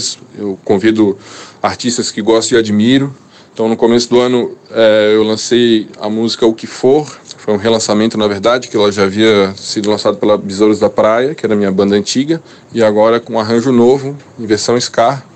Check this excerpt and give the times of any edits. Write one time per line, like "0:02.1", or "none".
none